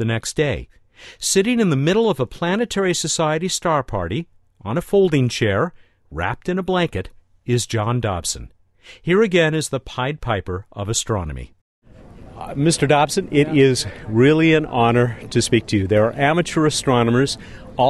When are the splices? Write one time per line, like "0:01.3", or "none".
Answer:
none

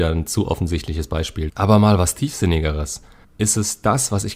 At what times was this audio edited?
0:01.5
0:03.2

